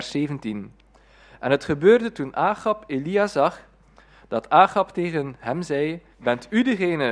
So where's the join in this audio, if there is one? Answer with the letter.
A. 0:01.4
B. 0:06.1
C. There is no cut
B